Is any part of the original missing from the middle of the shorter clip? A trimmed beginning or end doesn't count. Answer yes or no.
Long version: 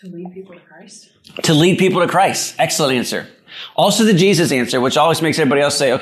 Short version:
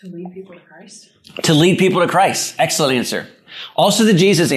no